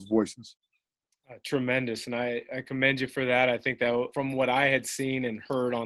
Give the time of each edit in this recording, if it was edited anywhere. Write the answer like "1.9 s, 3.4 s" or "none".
4.1 s